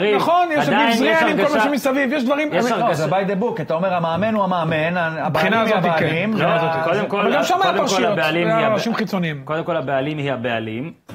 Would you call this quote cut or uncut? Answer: uncut